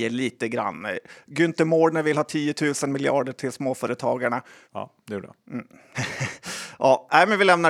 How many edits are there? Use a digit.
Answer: 2